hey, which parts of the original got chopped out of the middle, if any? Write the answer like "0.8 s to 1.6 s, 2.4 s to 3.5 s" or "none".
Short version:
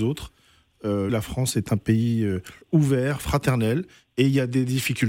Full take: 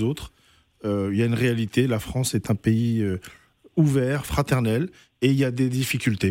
1.1 s to 1.9 s, 3.4 s to 3.7 s